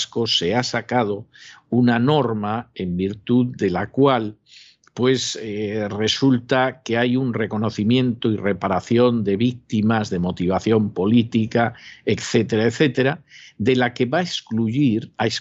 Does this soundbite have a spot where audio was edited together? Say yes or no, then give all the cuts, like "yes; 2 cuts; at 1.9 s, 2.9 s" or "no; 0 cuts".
no; 0 cuts